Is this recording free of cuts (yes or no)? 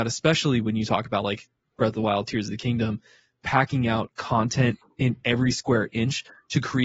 yes